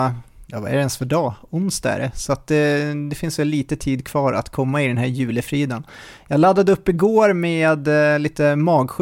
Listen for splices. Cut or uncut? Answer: uncut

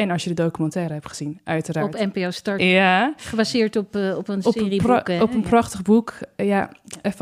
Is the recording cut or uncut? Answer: cut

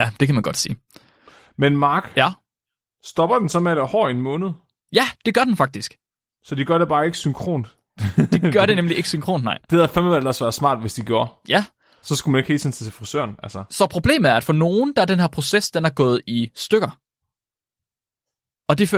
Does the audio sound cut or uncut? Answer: uncut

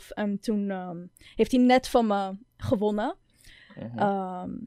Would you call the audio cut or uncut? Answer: uncut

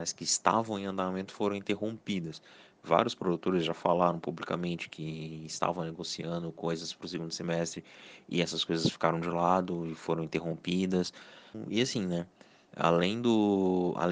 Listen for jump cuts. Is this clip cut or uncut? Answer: uncut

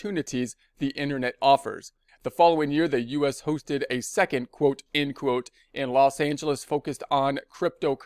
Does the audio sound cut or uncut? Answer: cut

